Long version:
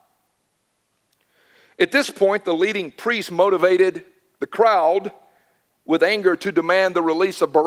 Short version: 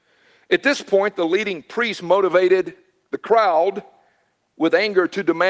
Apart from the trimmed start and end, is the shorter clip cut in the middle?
no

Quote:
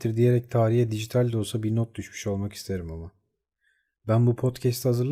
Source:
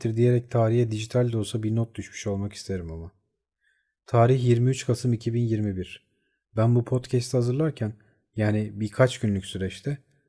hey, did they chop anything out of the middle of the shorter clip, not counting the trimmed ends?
yes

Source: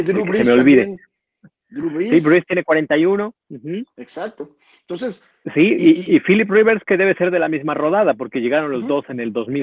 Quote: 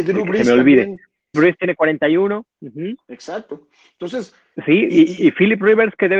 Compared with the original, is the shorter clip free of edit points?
no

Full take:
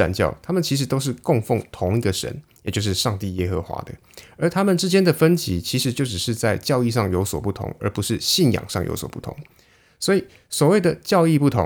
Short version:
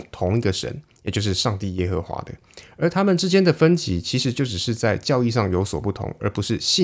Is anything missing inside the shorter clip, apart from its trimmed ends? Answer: no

